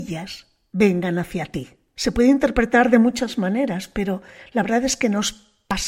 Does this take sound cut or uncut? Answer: cut